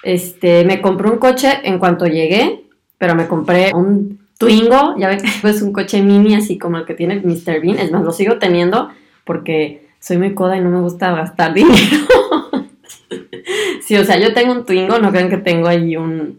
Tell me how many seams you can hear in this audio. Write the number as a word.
two